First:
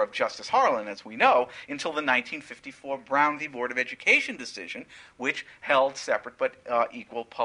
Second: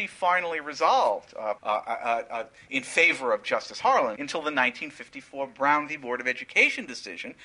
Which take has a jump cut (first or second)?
second